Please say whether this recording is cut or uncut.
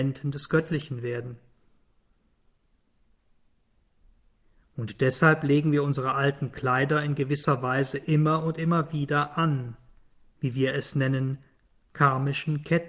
cut